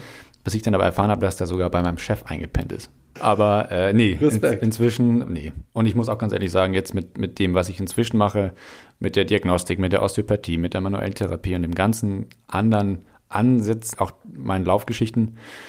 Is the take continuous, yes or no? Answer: yes